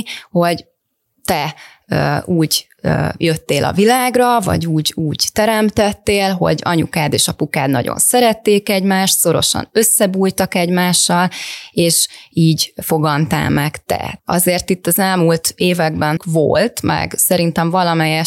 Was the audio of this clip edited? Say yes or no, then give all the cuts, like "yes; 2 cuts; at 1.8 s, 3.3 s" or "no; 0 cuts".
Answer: yes; 2 cuts; at 14.2 s, 16.2 s